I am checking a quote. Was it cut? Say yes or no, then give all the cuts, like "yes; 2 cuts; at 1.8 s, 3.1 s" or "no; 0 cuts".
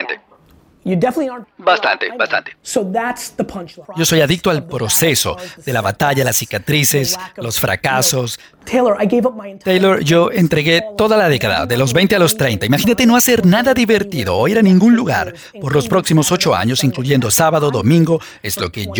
yes; 2 cuts; at 1.4 s, 3.8 s